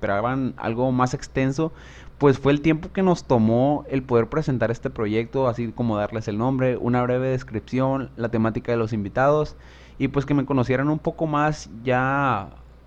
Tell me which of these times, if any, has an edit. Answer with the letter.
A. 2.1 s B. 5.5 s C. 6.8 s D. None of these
D